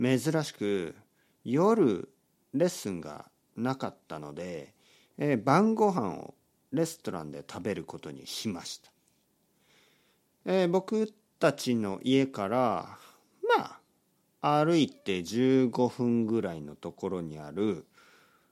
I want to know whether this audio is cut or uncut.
uncut